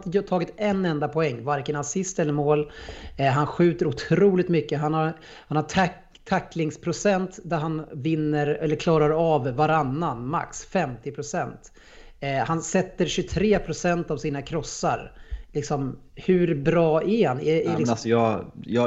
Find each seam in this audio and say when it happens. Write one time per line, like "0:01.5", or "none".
none